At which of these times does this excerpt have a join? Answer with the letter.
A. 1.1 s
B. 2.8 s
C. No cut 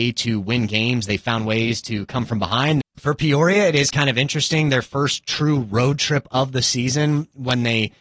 B